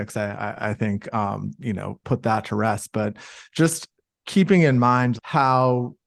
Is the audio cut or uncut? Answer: cut